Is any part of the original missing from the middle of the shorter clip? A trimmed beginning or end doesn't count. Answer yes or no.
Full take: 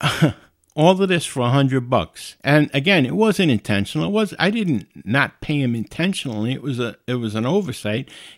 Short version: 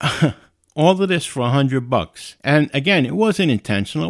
no